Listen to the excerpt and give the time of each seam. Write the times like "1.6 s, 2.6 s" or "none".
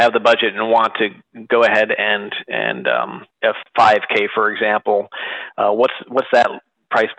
3.3 s